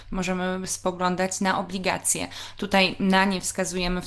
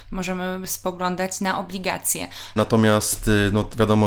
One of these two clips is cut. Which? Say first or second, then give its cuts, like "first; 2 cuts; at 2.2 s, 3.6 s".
second; 1 cut; at 2.6 s